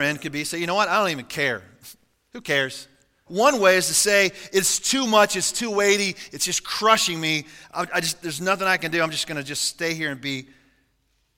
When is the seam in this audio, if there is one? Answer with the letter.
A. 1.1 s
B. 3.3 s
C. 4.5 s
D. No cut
B